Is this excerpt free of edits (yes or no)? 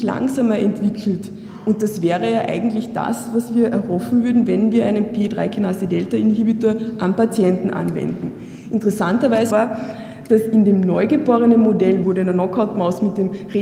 no